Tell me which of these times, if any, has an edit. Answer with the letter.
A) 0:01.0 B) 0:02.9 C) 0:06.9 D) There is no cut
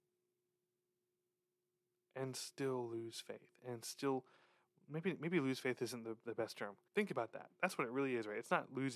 C